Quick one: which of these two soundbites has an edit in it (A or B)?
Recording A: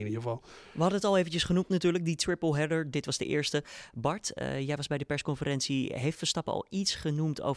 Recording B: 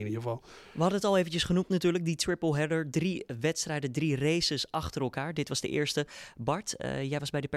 A